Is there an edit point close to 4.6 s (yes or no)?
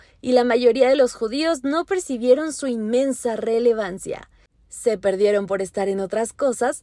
no